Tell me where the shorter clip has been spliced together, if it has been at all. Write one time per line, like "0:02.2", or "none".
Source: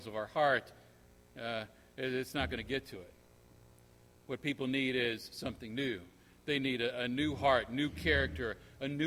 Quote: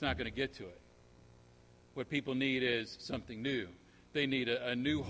none